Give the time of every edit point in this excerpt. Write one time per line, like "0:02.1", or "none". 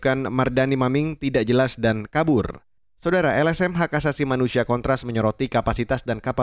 0:02.8